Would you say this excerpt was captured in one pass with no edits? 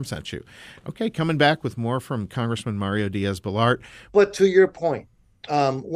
no; 1 cut; at 4.1 s

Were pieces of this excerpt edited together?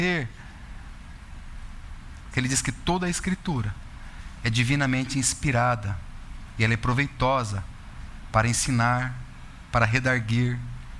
yes; 1 cut; at 2.3 s

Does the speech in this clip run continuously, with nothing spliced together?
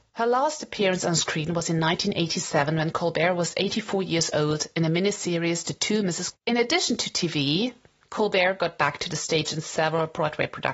no; 1 cut; at 6.3 s

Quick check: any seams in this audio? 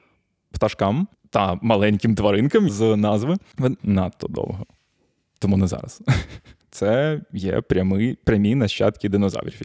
yes; 3 cuts; at 2.7 s, 3.8 s, 6.6 s

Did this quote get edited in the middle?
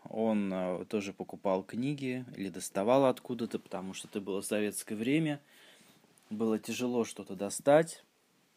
no; 0 cuts

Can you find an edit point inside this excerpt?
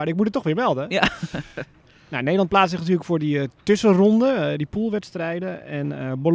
no; 0 cuts

